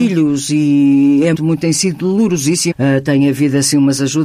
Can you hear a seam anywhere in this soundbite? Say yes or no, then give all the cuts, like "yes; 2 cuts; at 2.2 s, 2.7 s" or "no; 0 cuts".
yes; 2 cuts; at 1.3 s, 2.7 s